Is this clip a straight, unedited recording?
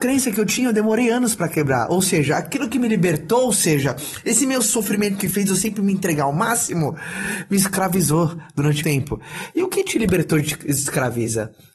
no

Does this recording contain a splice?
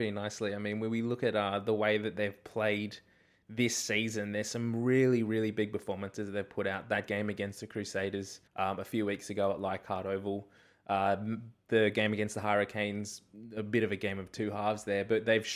yes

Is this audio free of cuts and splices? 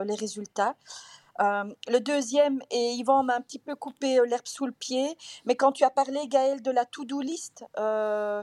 yes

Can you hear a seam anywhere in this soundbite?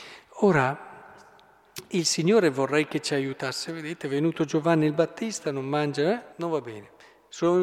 yes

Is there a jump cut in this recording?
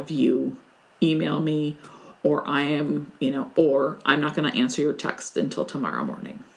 no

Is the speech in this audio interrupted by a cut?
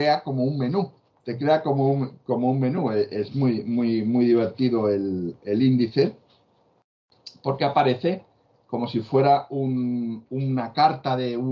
yes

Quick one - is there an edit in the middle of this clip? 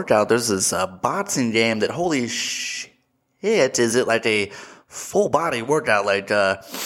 no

